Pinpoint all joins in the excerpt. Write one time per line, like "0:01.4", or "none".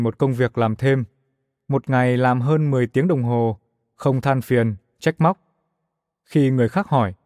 none